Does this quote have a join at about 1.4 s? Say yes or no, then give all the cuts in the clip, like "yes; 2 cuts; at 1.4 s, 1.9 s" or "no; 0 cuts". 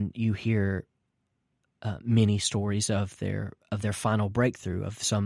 no; 0 cuts